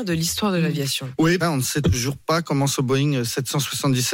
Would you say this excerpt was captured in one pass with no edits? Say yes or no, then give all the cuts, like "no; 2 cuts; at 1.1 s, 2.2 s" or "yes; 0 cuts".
no; 1 cut; at 1.4 s